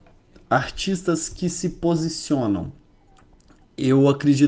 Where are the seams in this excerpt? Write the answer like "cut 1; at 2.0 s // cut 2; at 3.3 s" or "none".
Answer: none